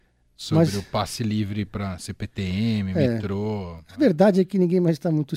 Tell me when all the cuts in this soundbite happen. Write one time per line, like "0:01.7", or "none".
none

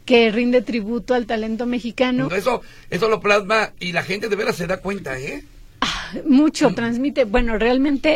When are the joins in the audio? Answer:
0:02.3
0:06.8

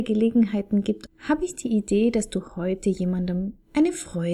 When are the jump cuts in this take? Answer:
0:01.1

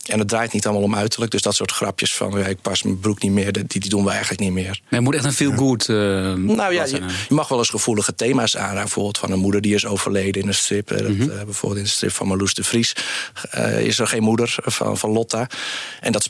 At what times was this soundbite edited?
none

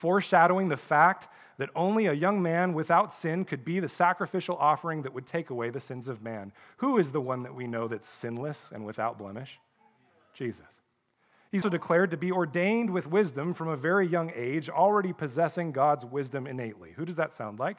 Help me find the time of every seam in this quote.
0:11.6

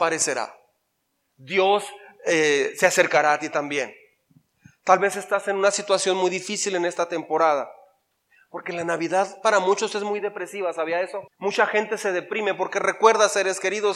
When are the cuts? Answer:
0:11.3

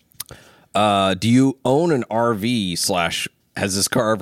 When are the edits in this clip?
none

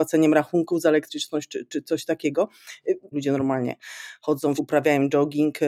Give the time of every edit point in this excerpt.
0:03.1
0:04.6

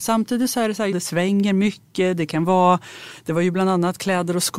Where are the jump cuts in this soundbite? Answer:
0:00.9

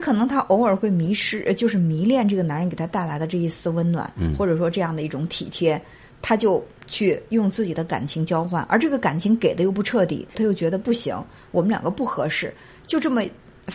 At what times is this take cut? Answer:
0:10.3

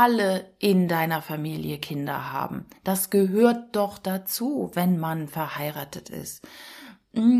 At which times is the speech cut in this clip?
none

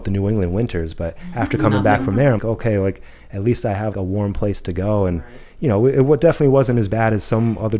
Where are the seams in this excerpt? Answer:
0:02.4
0:03.9

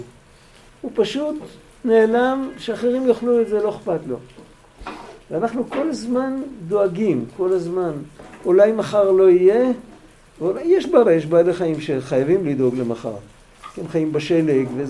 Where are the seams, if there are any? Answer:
0:11.1

